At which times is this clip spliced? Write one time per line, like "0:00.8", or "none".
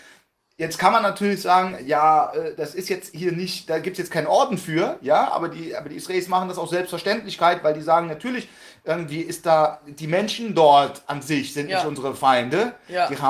none

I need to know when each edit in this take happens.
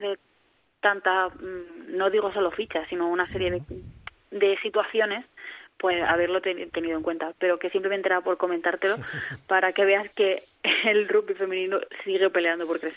none

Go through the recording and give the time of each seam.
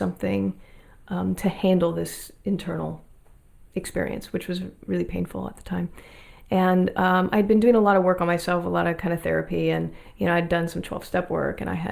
none

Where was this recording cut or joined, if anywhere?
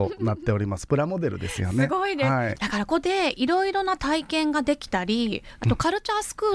0:02.9

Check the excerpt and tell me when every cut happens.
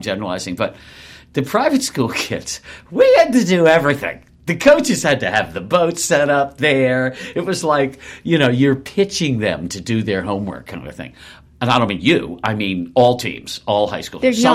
0:11.5

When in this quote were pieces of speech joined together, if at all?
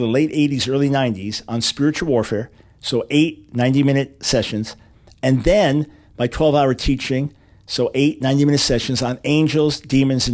none

